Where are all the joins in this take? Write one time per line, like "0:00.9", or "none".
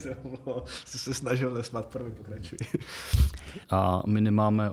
0:03.6